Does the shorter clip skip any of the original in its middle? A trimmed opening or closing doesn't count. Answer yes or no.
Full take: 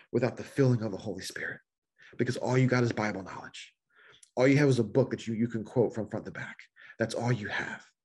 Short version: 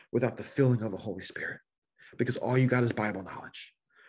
no